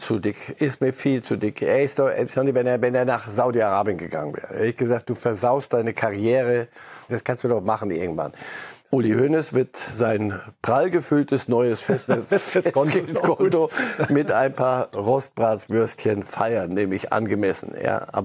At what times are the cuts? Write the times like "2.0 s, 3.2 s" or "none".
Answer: 7.1 s, 8.8 s, 12.3 s